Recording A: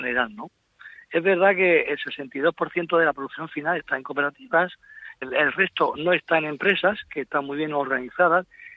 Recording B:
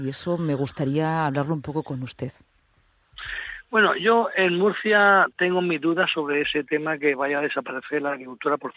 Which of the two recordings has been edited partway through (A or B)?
A